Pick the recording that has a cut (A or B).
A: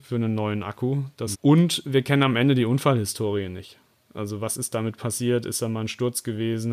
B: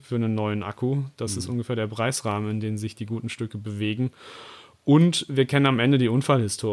A